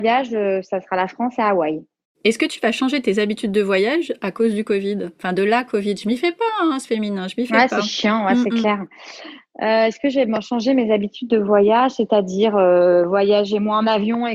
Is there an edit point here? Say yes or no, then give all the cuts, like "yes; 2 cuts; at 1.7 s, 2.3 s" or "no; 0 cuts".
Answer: no; 0 cuts